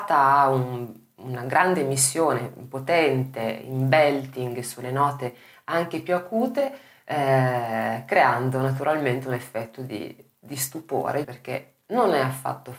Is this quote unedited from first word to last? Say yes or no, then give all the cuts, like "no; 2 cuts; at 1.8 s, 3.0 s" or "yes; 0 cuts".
no; 1 cut; at 11.2 s